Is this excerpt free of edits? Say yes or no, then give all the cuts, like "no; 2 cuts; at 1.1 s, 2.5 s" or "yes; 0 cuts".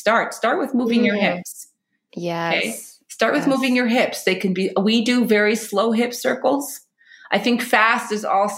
yes; 0 cuts